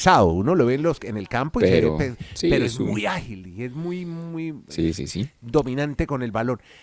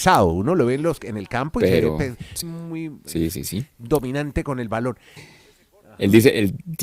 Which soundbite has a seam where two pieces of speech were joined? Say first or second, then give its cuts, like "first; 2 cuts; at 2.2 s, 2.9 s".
second; 2 cuts; at 2.4 s, 5.2 s